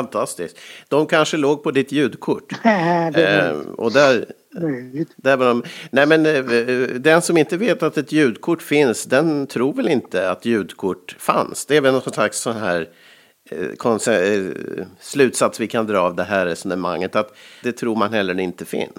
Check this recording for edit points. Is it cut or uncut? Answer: cut